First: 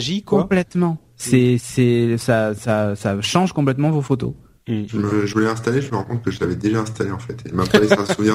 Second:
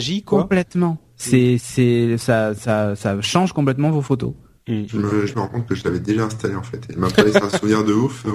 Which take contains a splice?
second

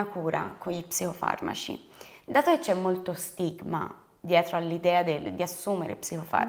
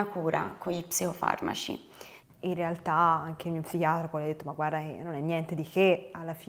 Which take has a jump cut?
second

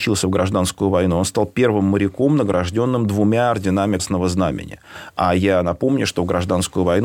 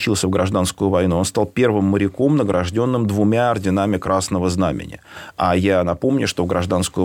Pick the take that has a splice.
first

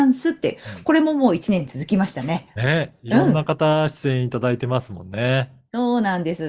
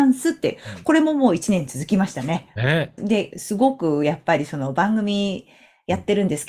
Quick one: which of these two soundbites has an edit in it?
second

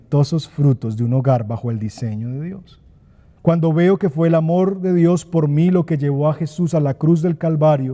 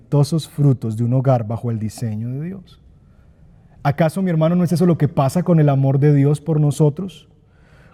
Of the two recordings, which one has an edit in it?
first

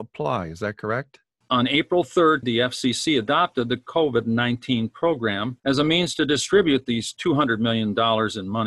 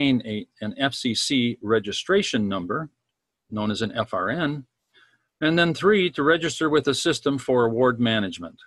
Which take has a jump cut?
first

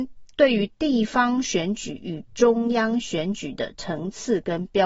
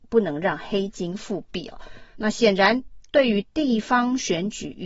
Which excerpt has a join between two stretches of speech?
second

